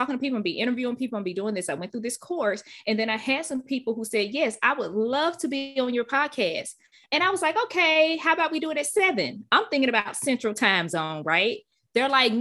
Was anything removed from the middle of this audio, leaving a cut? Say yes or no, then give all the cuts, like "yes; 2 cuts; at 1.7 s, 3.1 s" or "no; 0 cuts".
no; 0 cuts